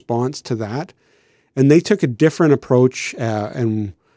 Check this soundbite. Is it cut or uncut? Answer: uncut